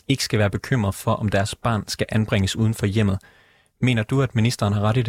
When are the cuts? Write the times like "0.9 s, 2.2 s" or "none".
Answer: none